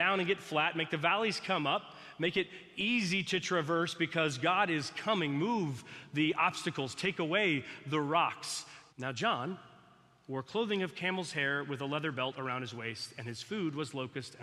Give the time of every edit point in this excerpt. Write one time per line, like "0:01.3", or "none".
0:08.9